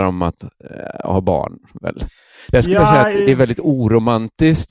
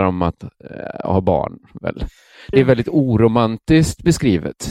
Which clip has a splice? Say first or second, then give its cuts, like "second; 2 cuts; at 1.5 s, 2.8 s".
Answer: second; 1 cut; at 2.5 s